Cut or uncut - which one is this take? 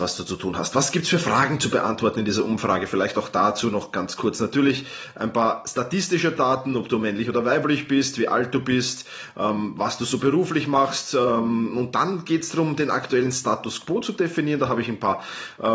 uncut